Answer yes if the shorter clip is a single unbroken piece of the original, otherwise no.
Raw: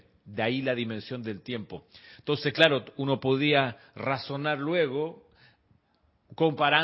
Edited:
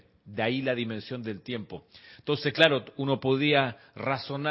yes